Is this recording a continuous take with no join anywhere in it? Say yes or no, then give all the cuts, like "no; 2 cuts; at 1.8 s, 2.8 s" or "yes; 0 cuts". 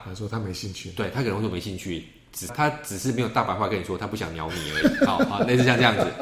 no; 1 cut; at 2.5 s